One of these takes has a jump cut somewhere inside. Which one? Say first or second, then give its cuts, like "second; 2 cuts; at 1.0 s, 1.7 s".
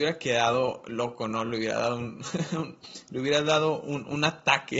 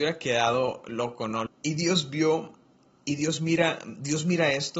second; 1 cut; at 1.5 s